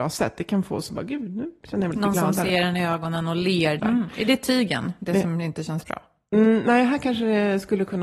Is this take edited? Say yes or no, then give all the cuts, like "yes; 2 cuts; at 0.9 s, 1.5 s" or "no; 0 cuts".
yes; 1 cut; at 3.8 s